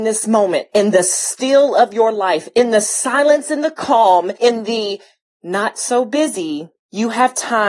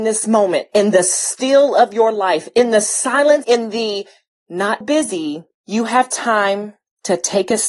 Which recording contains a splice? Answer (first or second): second